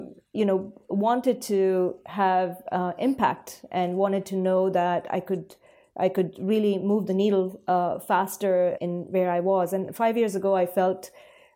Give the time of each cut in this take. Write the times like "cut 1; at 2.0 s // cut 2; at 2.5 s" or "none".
cut 1; at 8.8 s

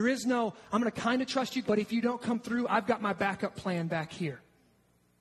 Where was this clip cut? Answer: cut 1; at 1.6 s

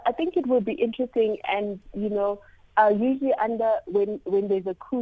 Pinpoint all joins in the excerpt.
none

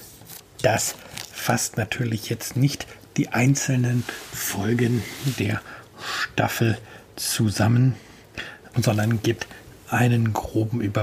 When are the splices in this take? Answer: cut 1; at 8.7 s

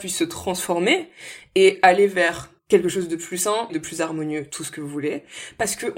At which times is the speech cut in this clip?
cut 1; at 2.6 s // cut 2; at 3.7 s

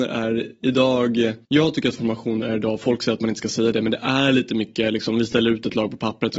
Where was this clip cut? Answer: cut 1; at 1.4 s

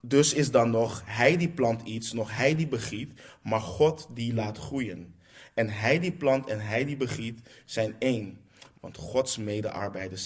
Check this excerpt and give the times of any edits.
cut 1; at 8.7 s

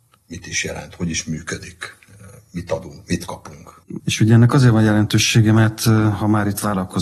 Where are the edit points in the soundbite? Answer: cut 1; at 4.0 s

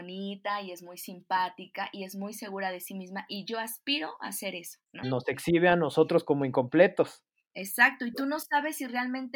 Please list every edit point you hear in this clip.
cut 1; at 5.0 s

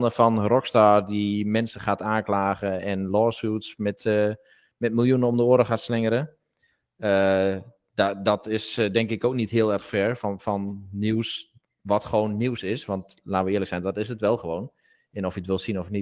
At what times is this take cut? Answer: none

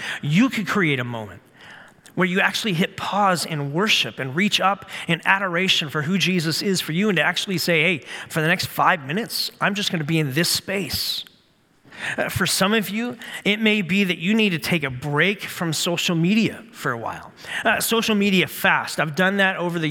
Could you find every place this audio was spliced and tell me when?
none

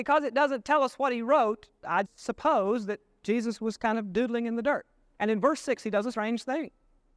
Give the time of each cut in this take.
cut 1; at 2.0 s // cut 2; at 5.2 s

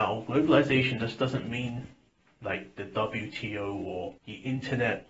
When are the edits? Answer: cut 1; at 4.2 s

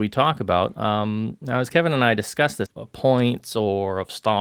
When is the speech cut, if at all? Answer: cut 1; at 2.7 s

